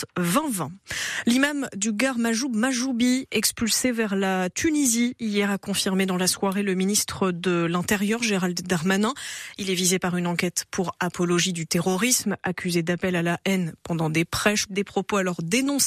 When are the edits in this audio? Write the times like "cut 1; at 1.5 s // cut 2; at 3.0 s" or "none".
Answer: cut 1; at 14.7 s